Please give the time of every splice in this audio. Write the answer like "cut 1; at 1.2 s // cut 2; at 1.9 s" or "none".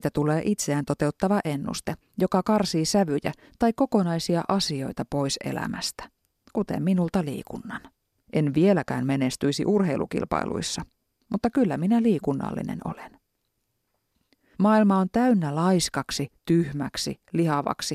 cut 1; at 8.3 s // cut 2; at 14.5 s